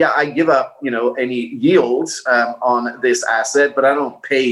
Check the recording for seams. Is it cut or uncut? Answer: uncut